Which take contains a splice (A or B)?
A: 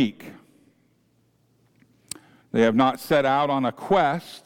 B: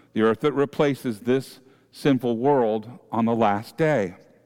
A